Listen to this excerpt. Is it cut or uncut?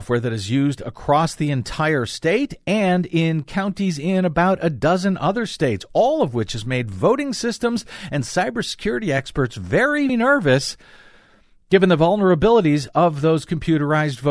cut